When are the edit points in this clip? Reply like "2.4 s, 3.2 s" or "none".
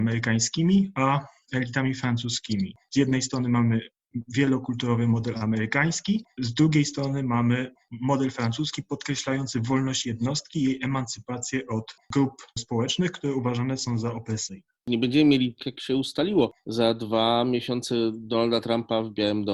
15.6 s